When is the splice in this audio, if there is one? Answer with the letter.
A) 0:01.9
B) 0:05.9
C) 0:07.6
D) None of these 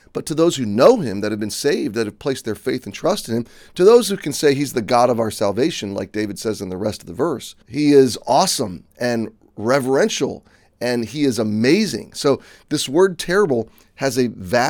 C